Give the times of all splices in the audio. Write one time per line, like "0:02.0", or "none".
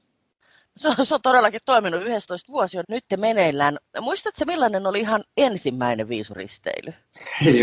0:02.8